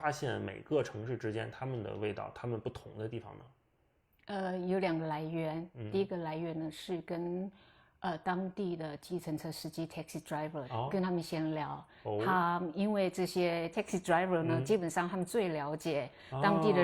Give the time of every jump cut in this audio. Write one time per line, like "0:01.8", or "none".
none

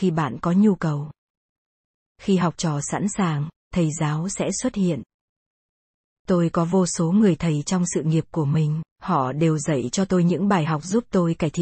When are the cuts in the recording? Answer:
0:02.1
0:08.9

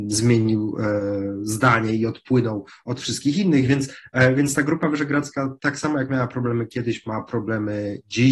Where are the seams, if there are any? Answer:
none

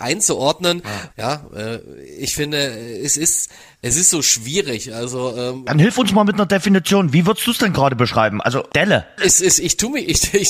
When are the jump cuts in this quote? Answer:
0:01.1

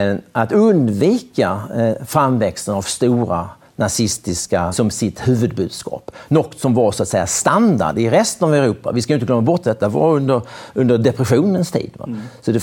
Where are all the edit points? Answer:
0:04.7

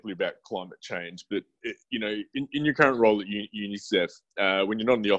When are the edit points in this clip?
none

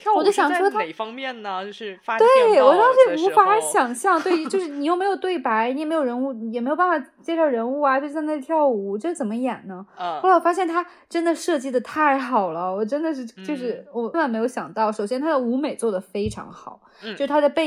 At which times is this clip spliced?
0:14.1

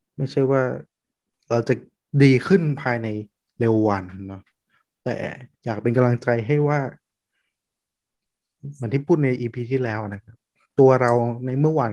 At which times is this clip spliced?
none

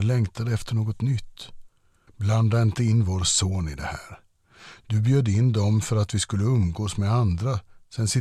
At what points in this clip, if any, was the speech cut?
0:02.1

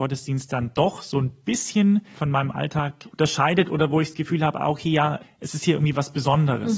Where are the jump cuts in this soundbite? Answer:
0:05.2

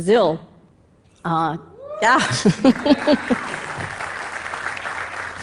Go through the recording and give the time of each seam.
none

